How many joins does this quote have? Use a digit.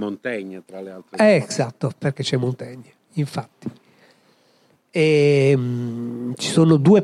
0